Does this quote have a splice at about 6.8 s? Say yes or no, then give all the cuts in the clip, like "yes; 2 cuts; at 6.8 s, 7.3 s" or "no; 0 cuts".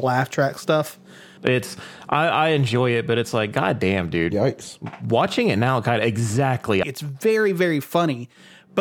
yes; 2 cuts; at 1.4 s, 6.8 s